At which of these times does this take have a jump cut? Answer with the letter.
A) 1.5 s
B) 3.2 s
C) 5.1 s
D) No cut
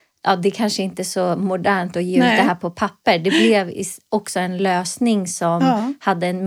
D